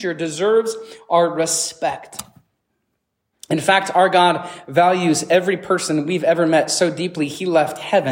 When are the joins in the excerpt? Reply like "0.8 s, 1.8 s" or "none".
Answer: none